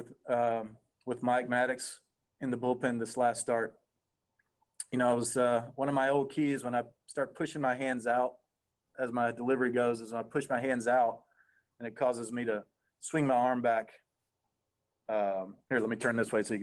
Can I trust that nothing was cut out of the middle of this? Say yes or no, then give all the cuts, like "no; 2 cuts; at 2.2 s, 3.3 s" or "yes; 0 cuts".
yes; 0 cuts